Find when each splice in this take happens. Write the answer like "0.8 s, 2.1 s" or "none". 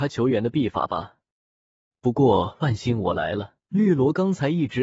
3.6 s